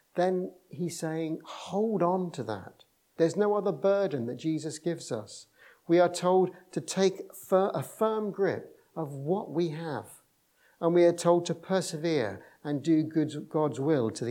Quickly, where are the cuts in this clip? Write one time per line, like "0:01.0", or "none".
0:03.2